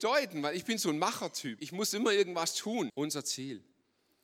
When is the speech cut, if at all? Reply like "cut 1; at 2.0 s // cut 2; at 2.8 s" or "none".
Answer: cut 1; at 1.6 s // cut 2; at 2.9 s

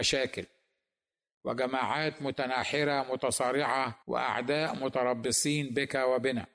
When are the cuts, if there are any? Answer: cut 1; at 4.0 s

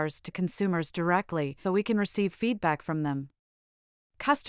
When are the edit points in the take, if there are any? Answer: cut 1; at 1.6 s

